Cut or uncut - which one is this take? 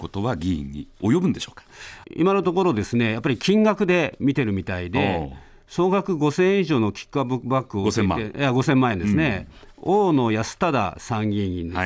cut